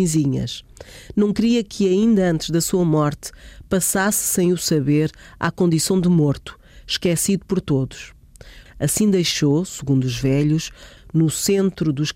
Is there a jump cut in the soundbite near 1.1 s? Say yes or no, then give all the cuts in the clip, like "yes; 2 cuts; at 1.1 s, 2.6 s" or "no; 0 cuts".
no; 2 cuts; at 8.7 s, 11.0 s